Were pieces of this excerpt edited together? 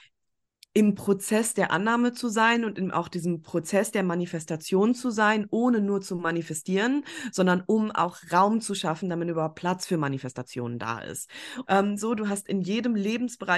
yes; 1 cut; at 11.6 s

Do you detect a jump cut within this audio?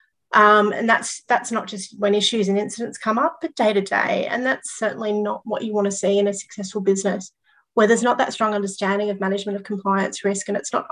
no; 0 cuts

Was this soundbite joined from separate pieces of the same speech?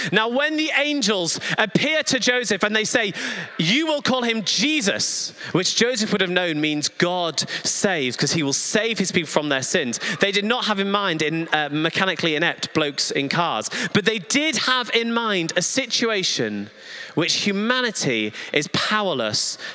no; 0 cuts

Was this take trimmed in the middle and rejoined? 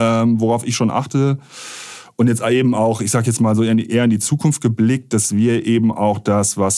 no; 0 cuts

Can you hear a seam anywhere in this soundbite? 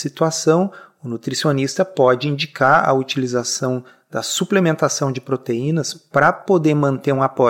no; 0 cuts

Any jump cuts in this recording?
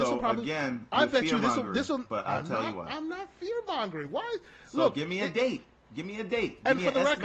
no; 0 cuts

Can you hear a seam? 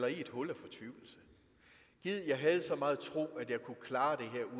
no; 0 cuts

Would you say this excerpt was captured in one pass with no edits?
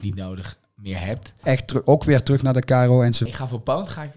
no; 2 cuts; at 1.4 s, 3.3 s

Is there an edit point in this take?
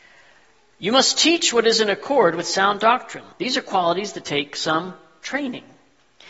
yes; 1 cut; at 3.3 s

